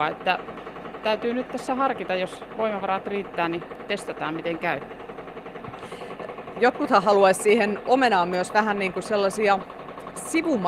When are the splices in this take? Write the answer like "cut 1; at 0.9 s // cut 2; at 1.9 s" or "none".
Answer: none